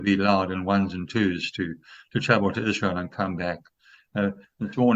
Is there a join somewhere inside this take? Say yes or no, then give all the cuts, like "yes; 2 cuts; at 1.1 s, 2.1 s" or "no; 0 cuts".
no; 0 cuts